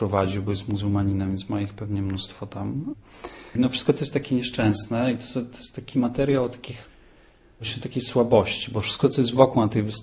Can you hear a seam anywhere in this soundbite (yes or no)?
yes